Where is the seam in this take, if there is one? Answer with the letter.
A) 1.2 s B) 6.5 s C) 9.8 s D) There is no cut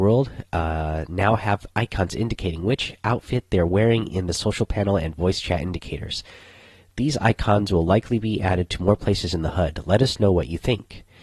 D